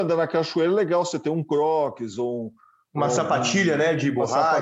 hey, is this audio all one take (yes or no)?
yes